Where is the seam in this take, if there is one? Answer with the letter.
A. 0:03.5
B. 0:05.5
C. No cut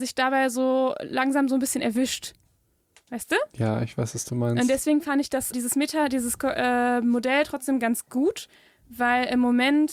B